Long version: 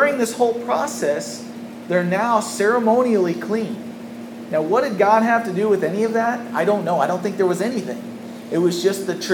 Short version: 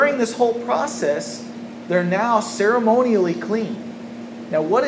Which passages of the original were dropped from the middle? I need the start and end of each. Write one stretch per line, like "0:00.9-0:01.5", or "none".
none